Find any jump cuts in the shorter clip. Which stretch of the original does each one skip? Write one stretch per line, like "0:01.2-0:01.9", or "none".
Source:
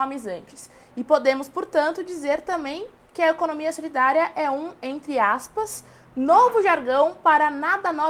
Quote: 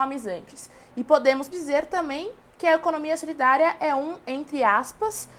0:01.5-0:02.1